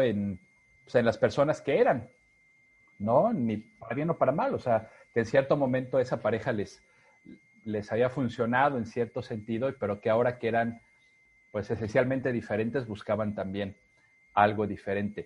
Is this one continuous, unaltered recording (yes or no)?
yes